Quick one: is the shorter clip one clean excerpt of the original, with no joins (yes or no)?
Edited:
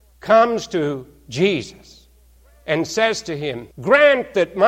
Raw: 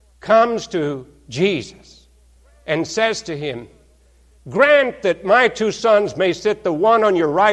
no